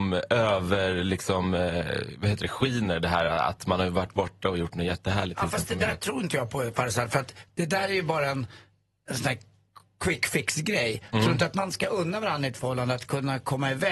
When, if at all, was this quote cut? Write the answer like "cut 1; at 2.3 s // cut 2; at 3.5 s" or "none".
none